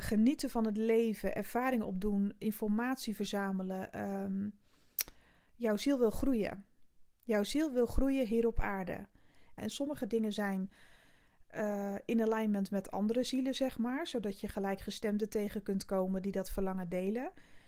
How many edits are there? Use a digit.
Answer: 1